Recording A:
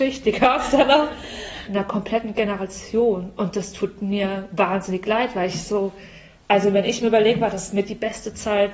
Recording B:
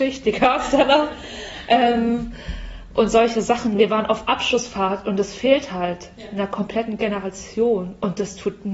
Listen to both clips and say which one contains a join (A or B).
A